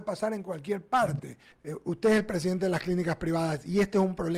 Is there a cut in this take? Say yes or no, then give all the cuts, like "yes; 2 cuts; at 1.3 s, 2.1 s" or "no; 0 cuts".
yes; 1 cut; at 1.5 s